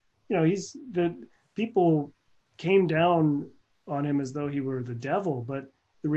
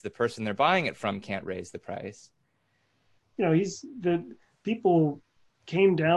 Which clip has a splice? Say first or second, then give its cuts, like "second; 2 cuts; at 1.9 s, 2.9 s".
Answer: second; 1 cut; at 3.2 s